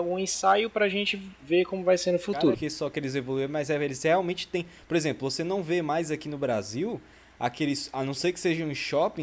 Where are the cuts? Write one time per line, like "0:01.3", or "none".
0:02.5